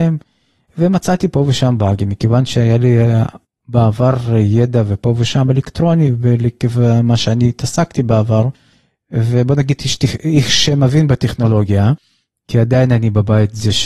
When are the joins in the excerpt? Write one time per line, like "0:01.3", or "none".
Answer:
none